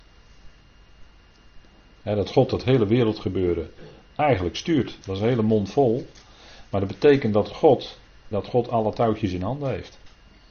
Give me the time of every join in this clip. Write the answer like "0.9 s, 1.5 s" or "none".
5.0 s, 8.3 s